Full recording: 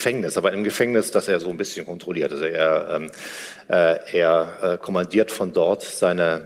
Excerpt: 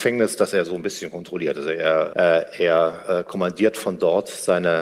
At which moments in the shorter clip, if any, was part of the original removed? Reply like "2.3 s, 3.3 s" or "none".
2.1 s